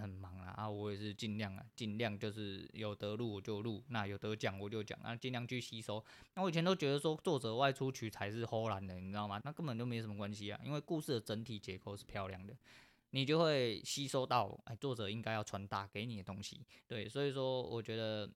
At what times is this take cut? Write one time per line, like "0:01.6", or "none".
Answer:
0:09.4

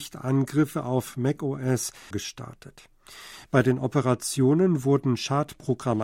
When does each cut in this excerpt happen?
0:02.1
0:03.4

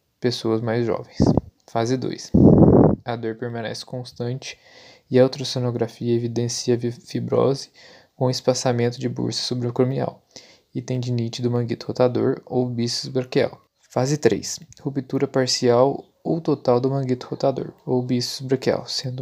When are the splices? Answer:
0:01.6
0:13.7
0:17.8

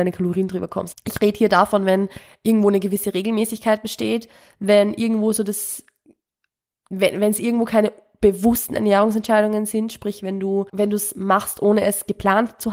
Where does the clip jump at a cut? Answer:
0:00.9
0:10.7

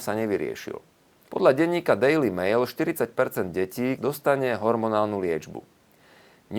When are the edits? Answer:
0:01.3
0:04.0

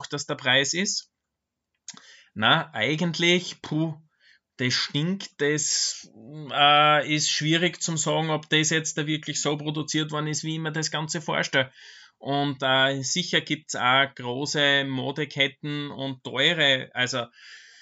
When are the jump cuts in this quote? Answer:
none

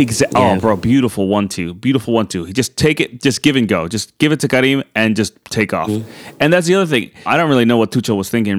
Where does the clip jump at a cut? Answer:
0:07.3

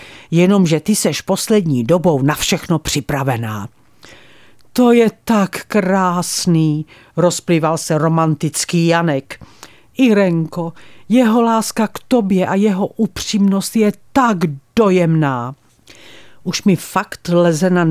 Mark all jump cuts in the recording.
none

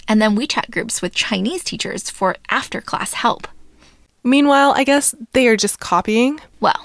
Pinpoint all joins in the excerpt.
0:04.1

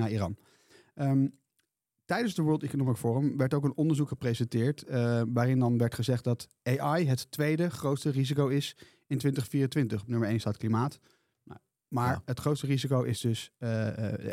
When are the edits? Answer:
none

